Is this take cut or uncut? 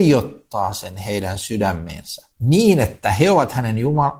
cut